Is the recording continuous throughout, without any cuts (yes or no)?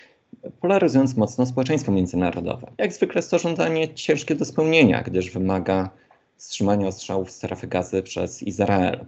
no